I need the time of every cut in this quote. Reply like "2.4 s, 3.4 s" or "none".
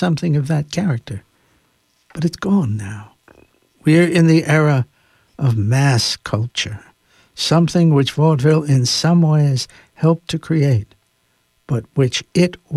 none